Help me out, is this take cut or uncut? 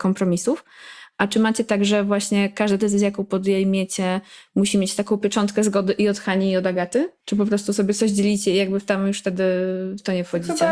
uncut